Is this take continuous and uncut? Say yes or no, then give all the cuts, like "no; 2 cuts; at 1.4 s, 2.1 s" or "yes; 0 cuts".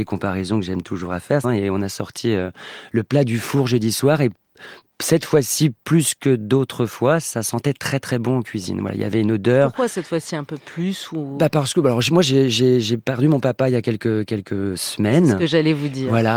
no; 1 cut; at 1.4 s